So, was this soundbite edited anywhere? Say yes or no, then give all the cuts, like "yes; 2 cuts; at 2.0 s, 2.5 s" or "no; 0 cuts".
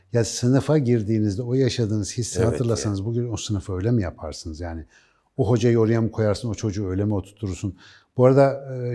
no; 0 cuts